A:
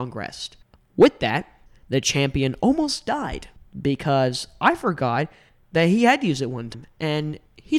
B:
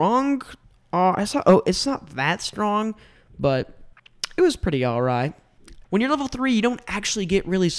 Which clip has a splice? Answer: B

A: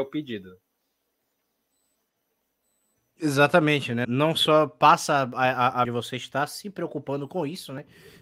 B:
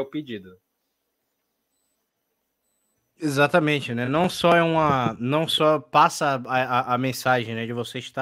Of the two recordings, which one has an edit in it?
A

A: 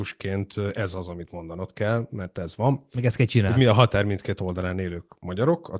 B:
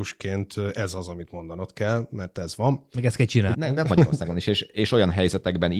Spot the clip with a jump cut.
B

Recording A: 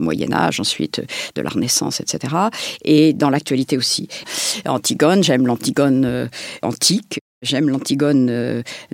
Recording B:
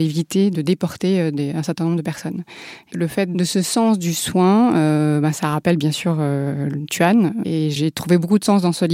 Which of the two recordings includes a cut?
A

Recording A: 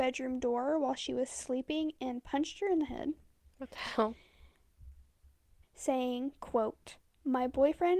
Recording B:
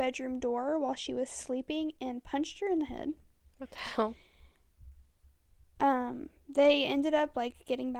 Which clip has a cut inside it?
A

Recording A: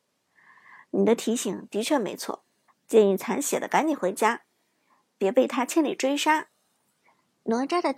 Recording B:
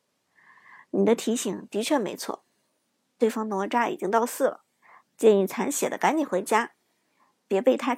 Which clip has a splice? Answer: A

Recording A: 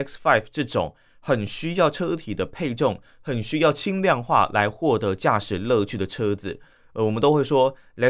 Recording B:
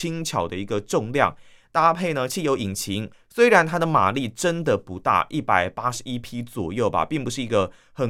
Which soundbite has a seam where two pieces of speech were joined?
B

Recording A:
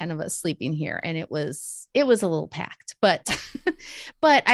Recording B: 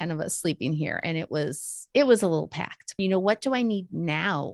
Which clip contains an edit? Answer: B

